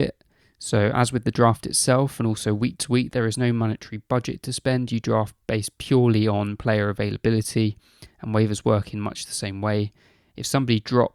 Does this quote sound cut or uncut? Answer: uncut